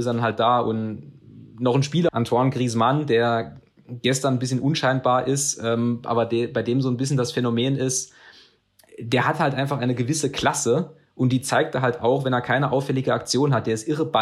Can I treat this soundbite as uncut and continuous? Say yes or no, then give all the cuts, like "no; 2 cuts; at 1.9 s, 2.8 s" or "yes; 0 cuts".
no; 1 cut; at 2.1 s